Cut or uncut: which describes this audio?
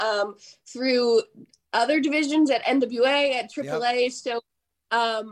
uncut